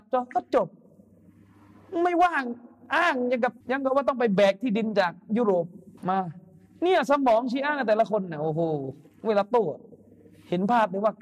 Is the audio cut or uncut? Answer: cut